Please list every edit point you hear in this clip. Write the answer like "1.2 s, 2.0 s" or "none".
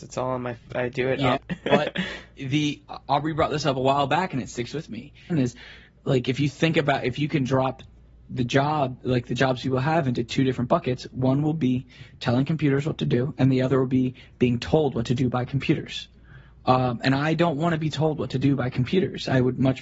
1.3 s, 5.3 s